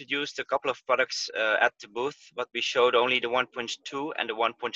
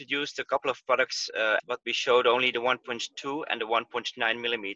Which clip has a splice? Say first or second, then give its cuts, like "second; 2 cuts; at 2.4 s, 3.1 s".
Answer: second; 1 cut; at 1.6 s